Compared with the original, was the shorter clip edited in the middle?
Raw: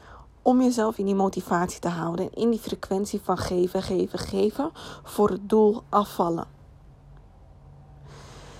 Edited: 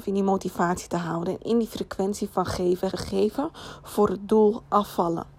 yes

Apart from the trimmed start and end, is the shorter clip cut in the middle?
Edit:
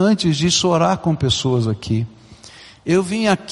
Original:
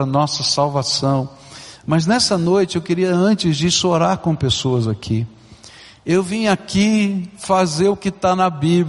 no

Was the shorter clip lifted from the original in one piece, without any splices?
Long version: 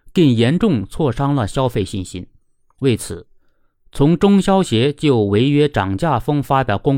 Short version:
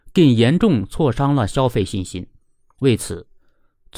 yes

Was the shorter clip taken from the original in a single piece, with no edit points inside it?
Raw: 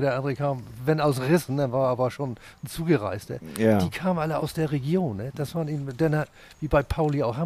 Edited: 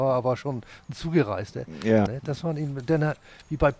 no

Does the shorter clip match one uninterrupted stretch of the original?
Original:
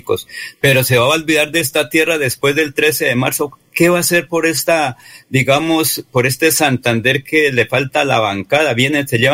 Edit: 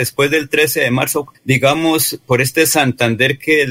no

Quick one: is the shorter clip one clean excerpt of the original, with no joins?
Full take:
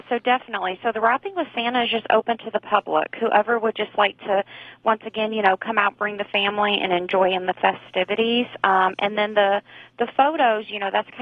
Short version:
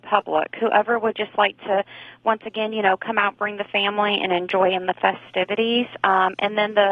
yes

